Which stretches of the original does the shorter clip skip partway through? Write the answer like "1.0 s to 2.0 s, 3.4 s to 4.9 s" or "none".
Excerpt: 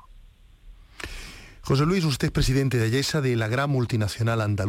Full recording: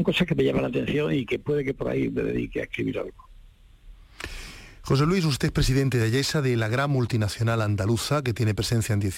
none